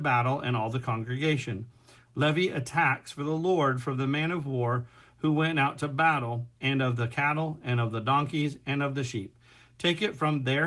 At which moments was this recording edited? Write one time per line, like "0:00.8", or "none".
0:06.5